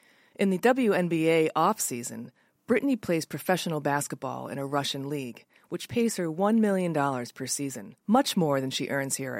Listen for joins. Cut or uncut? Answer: cut